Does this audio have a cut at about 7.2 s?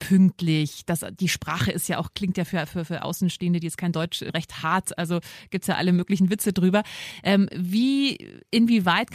no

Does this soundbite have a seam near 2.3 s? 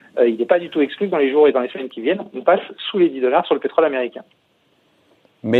no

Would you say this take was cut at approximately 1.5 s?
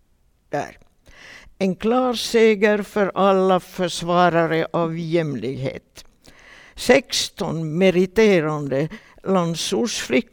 no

